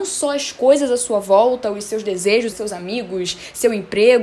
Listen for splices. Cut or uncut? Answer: cut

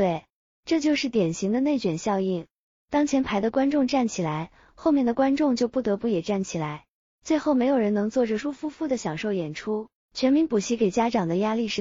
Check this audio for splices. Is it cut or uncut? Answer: cut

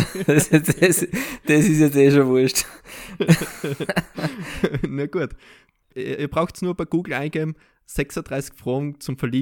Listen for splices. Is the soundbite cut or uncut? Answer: uncut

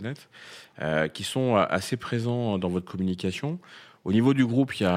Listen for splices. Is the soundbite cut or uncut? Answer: uncut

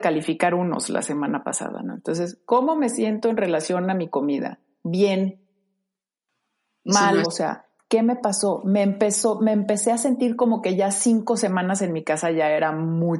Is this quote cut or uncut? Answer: cut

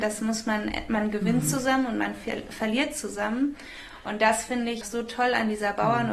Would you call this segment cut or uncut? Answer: cut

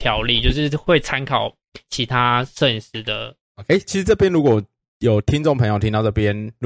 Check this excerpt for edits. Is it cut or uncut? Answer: uncut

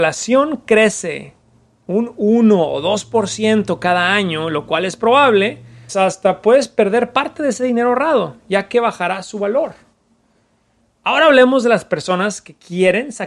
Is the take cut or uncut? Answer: cut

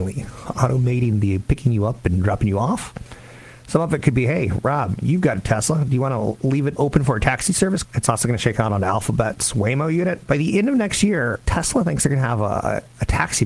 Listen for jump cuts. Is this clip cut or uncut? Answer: cut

